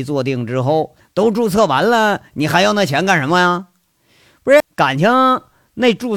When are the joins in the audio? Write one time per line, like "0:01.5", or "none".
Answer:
0:01.0
0:04.6